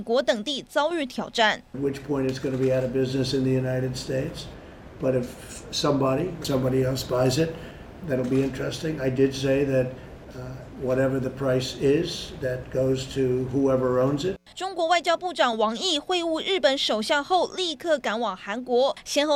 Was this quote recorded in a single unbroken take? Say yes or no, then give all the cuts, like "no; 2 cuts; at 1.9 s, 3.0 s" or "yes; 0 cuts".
no; 2 cuts; at 10.7 s, 14.5 s